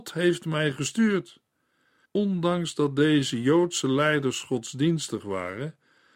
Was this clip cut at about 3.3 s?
no; 1 cut; at 2.0 s

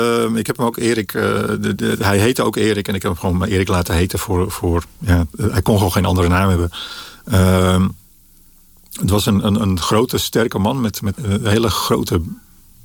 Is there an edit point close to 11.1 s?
yes; 1 cut; at 11.1 s

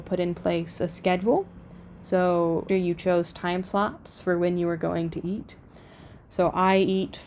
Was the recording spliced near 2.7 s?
yes; 1 cut; at 2.7 s

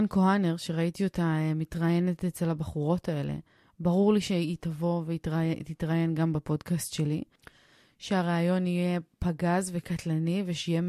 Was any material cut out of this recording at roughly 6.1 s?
no; 0 cuts

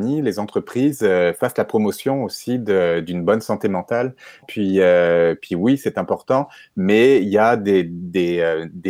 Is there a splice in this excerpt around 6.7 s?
no; 1 cut; at 4.4 s

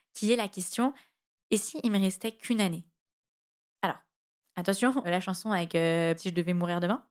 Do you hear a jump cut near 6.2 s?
yes; 2 cuts; at 5.0 s, 6.2 s

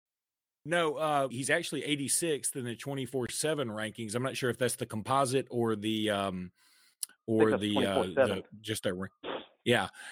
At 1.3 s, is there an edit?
yes; 1 cut; at 1.3 s

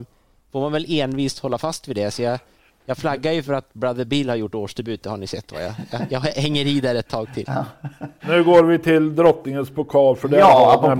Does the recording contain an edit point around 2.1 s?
no; 0 cuts

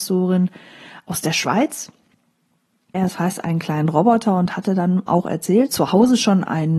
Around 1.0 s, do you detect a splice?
no; 2 cuts; at 2.9 s, 5.7 s

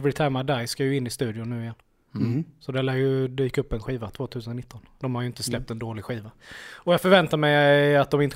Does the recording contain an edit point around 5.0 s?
yes; 1 cut; at 5.0 s

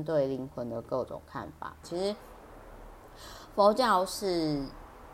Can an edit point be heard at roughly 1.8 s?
yes; 1 cut; at 1.8 s

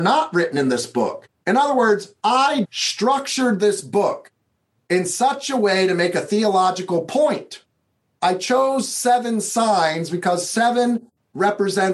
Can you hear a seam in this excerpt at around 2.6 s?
yes; 1 cut; at 2.6 s

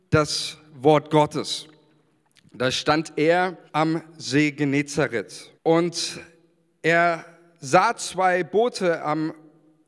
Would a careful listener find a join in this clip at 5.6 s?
yes; 2 cuts; at 3.7 s, 5.6 s

